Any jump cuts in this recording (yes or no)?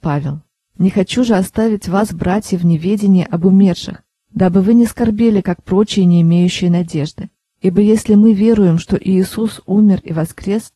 no